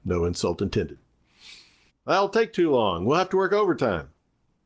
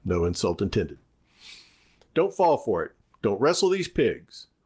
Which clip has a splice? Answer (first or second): first